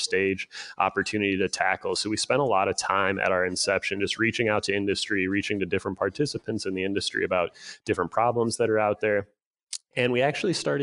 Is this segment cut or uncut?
uncut